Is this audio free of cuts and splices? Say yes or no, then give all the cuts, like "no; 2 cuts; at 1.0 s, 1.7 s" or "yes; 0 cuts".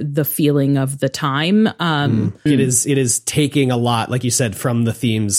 no; 1 cut; at 2.5 s